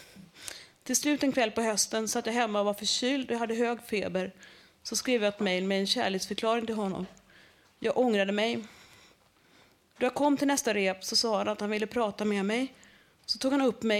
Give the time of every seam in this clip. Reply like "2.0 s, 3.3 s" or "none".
none